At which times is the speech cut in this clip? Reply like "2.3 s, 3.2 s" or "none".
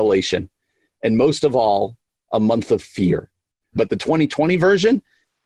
3.8 s